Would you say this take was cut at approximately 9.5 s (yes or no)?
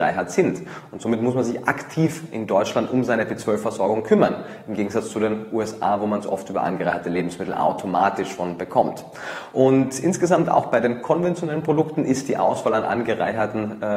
no